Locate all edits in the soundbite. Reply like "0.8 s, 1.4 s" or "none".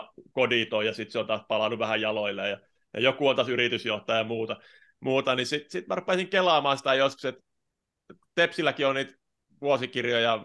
none